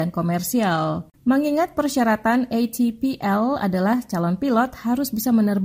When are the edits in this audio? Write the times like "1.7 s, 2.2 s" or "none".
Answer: 1.1 s